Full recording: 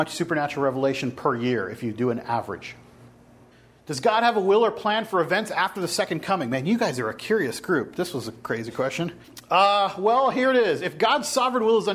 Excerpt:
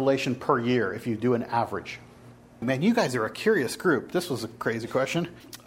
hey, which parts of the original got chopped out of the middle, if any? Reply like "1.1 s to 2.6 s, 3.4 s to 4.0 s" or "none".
3.4 s to 6.5 s